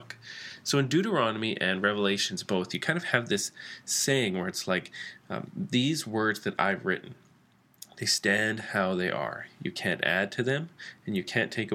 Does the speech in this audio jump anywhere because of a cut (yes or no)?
no